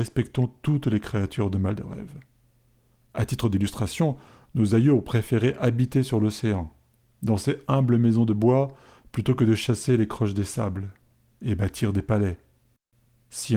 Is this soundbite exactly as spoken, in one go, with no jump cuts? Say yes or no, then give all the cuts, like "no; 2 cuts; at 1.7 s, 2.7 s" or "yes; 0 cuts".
yes; 0 cuts